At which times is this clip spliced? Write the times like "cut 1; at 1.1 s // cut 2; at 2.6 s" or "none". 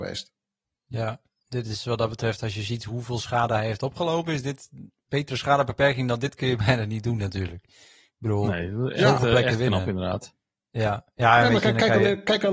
none